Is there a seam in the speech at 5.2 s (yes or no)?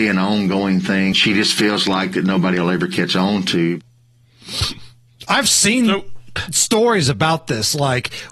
no